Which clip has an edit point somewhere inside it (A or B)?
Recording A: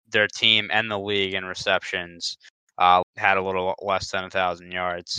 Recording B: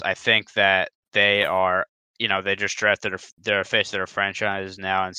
A